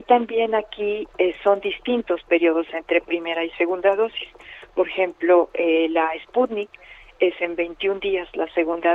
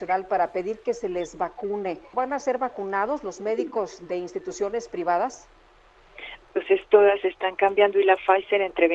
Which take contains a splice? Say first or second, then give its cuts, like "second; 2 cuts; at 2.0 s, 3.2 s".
second; 2 cuts; at 2.1 s, 6.4 s